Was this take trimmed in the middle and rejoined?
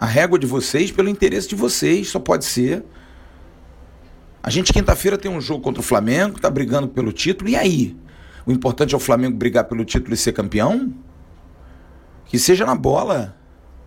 no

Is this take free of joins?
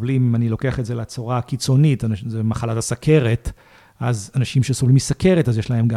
yes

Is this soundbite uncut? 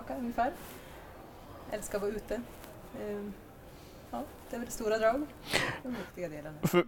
no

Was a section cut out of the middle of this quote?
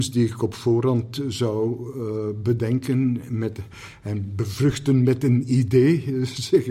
no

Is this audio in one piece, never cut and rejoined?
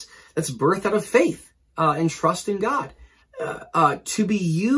no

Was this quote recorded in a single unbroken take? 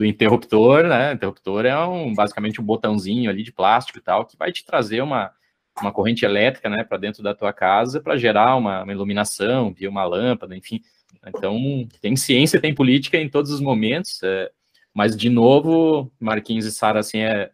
yes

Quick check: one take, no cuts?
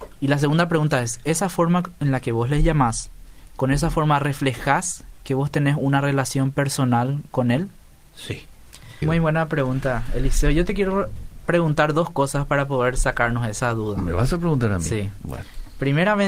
no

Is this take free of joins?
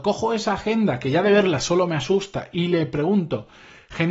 yes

